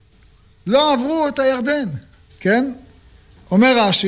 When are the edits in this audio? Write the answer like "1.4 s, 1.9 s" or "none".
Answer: 2.3 s